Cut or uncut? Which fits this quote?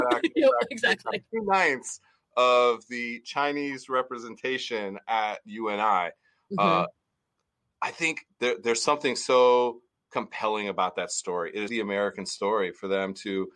cut